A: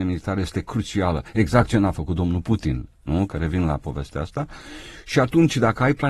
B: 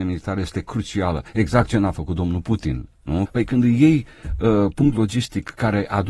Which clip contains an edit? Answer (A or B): B